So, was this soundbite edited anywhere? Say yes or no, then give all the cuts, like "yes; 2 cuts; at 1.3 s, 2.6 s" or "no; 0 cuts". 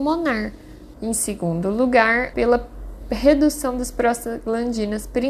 yes; 2 cuts; at 0.9 s, 2.3 s